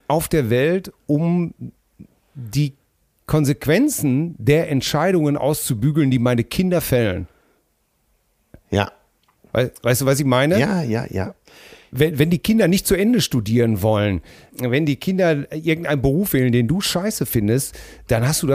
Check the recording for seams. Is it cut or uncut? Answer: uncut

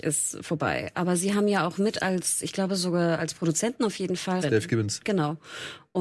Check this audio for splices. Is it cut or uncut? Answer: cut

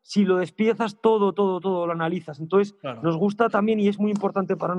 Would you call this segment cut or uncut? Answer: uncut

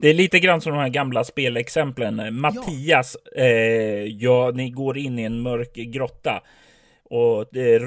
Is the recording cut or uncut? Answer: uncut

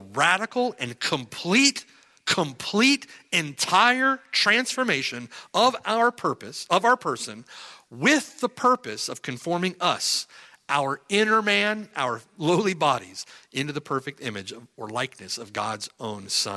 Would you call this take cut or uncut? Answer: cut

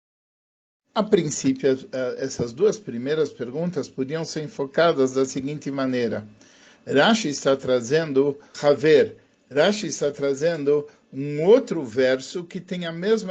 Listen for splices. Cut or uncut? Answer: cut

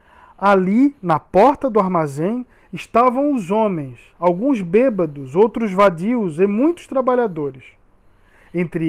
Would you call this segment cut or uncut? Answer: uncut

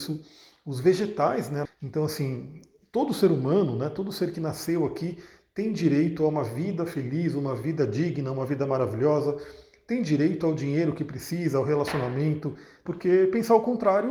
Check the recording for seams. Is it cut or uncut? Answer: cut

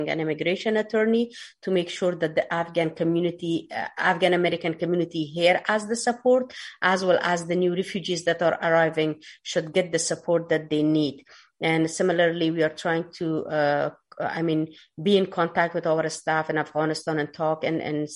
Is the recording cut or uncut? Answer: uncut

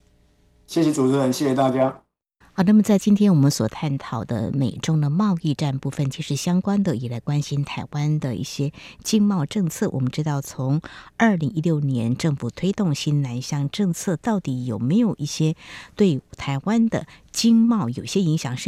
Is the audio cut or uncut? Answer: uncut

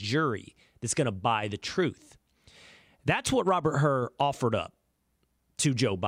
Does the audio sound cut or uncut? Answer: uncut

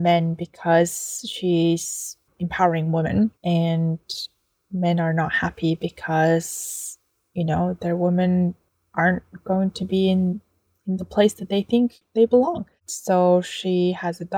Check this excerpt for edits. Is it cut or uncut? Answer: cut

